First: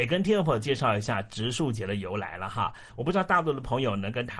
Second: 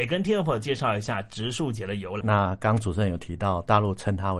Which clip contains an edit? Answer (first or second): second